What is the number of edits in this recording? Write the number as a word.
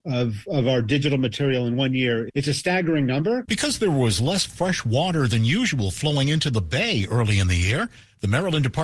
one